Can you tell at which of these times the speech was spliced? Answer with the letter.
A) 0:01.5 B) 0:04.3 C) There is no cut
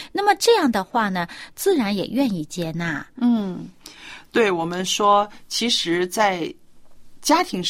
A